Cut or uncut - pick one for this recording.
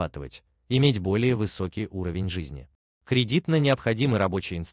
cut